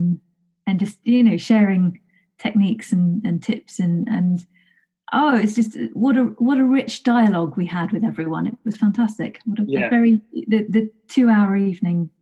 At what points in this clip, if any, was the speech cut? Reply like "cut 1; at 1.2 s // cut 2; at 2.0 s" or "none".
none